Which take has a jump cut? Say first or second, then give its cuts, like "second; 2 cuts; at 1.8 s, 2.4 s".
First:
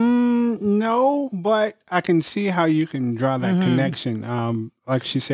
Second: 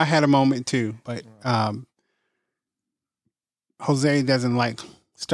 second; 1 cut; at 1.0 s